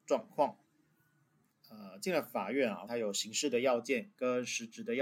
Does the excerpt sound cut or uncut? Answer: cut